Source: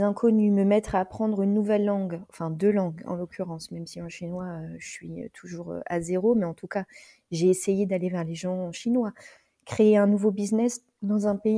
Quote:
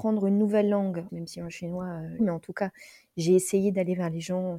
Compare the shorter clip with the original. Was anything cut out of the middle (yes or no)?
yes